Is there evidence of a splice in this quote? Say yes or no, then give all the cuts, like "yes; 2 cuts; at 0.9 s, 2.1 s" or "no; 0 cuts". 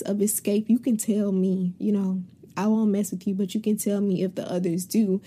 no; 0 cuts